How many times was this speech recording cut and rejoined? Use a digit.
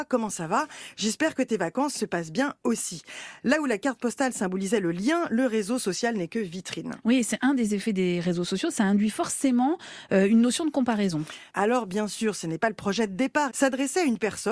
2